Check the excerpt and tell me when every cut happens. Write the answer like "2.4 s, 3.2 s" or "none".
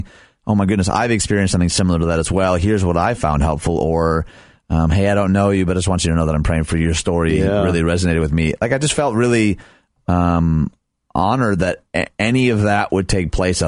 none